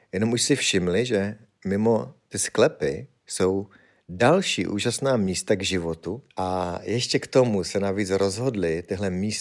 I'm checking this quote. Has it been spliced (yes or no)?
yes